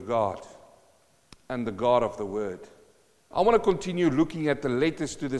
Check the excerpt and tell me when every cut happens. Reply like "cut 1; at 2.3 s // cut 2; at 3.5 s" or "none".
cut 1; at 3.3 s